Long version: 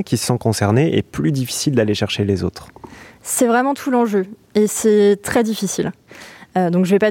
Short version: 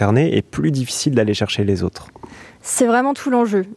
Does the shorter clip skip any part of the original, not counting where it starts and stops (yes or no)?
no